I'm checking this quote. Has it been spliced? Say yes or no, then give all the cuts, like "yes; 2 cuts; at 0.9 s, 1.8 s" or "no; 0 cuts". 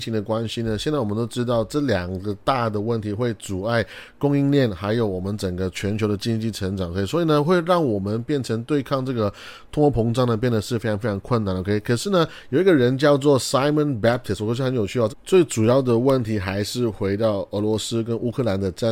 yes; 1 cut; at 15.1 s